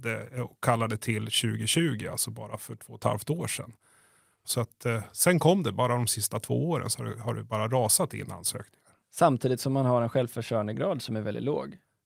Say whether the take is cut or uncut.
cut